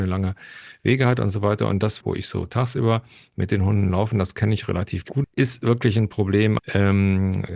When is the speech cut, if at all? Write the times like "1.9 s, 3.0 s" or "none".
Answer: 2.0 s, 5.2 s, 6.6 s